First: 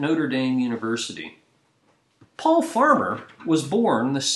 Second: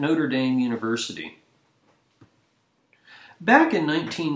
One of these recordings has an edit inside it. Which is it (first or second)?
first